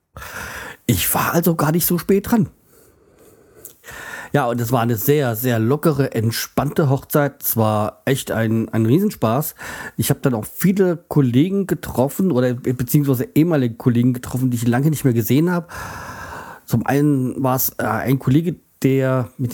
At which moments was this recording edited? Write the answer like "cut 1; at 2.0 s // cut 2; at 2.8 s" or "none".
none